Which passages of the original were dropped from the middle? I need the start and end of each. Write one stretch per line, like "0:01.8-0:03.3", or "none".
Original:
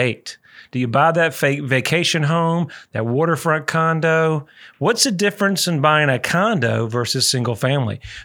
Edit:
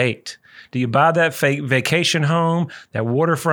none